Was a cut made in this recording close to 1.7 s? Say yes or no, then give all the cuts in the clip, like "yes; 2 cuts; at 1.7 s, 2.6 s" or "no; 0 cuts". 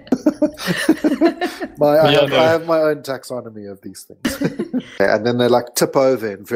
no; 1 cut; at 5.0 s